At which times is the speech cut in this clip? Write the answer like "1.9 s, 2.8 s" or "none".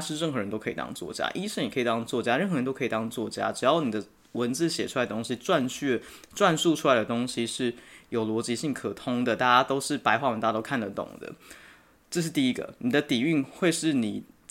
none

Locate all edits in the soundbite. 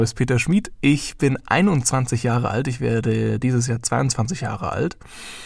none

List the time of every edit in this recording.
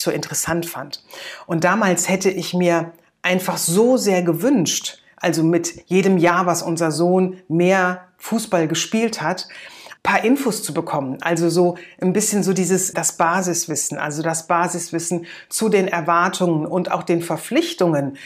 10.0 s, 12.9 s

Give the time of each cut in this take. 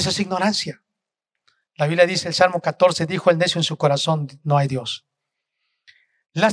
none

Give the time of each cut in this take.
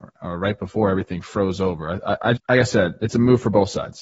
2.4 s

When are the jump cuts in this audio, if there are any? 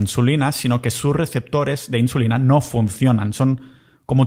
none

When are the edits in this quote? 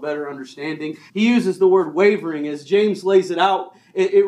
1.1 s

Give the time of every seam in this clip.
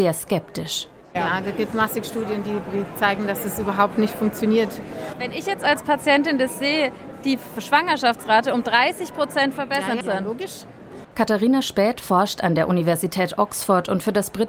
10.0 s, 11.0 s

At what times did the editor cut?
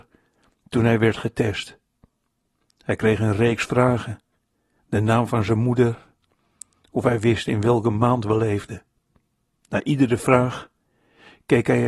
4.8 s

